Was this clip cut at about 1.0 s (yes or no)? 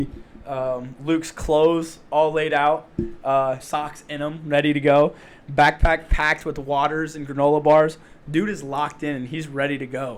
no